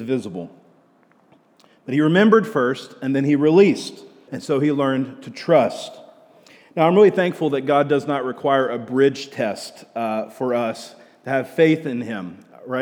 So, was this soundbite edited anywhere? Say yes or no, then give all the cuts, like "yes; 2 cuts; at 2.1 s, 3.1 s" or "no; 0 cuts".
yes; 1 cut; at 4.3 s